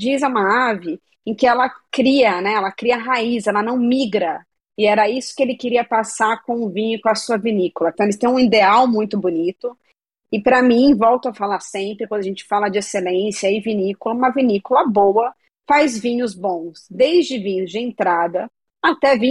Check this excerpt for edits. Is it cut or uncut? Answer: cut